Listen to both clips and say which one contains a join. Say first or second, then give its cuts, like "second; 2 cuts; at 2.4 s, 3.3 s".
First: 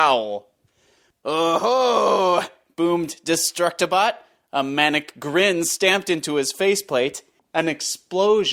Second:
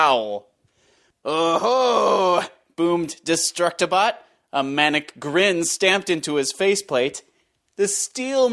first; 1 cut; at 7.4 s